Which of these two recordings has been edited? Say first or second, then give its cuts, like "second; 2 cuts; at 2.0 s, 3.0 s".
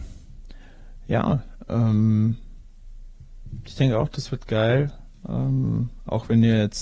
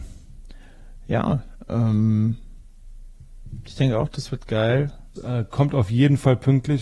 second; 1 cut; at 5.2 s